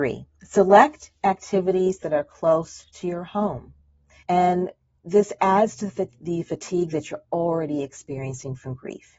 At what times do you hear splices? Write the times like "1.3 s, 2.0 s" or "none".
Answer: 4.2 s

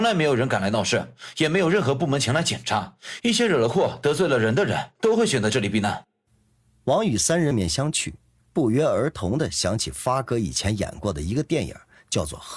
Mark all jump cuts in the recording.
7.5 s

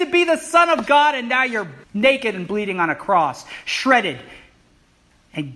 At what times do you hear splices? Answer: 1.8 s

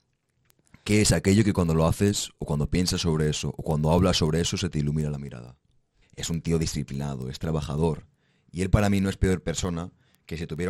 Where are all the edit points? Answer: 6.0 s

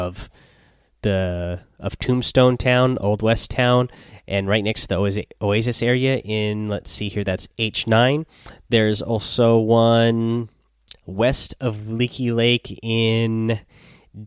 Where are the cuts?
8.6 s

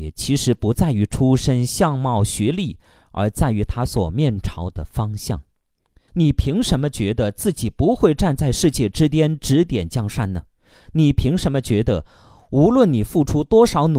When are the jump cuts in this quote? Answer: 6.1 s

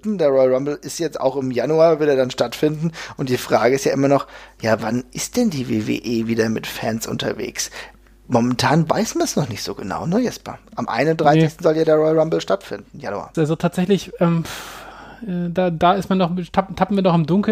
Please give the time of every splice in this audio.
13.3 s

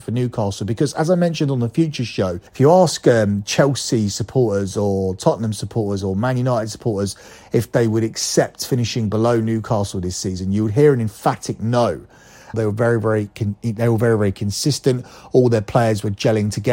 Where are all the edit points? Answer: 2.5 s, 12.5 s

